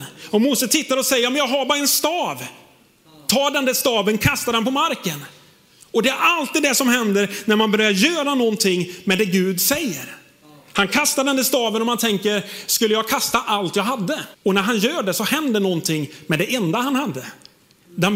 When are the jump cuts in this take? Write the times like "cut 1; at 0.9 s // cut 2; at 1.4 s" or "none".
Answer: cut 1; at 14.3 s